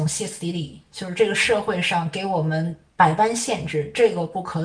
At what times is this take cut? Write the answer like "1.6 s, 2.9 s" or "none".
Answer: none